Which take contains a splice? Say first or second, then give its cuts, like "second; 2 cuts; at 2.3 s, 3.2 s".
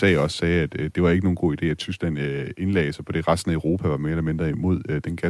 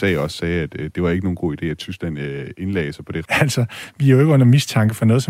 second; 1 cut; at 3.3 s